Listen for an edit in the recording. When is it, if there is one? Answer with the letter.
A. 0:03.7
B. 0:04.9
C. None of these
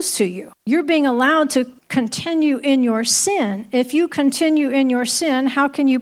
C